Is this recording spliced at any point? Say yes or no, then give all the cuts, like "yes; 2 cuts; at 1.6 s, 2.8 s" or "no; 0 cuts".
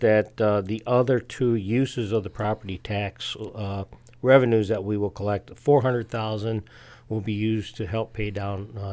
no; 0 cuts